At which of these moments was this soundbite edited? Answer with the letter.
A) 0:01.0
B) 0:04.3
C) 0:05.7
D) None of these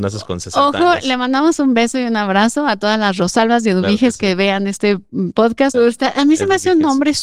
C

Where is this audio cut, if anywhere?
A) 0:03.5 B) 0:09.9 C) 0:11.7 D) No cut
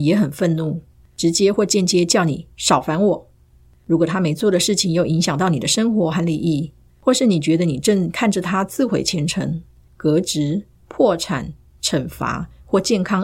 B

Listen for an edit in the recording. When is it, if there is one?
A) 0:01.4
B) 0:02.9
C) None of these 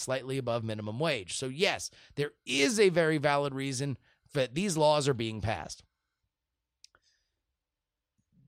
C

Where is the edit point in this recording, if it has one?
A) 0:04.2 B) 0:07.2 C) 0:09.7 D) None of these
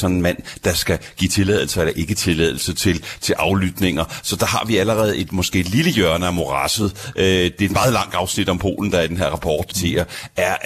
C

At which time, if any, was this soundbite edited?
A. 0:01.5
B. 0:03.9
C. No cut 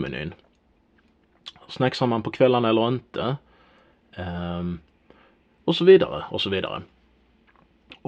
C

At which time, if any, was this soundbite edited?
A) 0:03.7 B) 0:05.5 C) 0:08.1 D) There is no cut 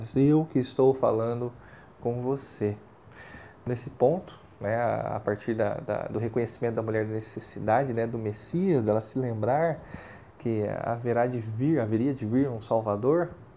A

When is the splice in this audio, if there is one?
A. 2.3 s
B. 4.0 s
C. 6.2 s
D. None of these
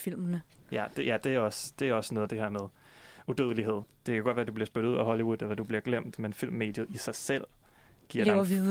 A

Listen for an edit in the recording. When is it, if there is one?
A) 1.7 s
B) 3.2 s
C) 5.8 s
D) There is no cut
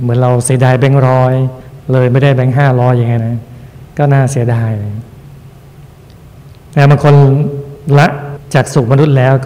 B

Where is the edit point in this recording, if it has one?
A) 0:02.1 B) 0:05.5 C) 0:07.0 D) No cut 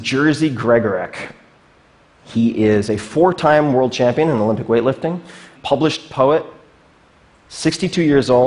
B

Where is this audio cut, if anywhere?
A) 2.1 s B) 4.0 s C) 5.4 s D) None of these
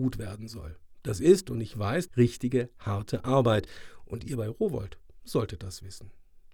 A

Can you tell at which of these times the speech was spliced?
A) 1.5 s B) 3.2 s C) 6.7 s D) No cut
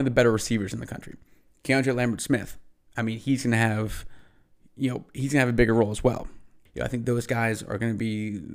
C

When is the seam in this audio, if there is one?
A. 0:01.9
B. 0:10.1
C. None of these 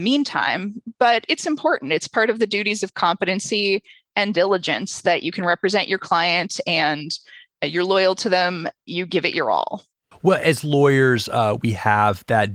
B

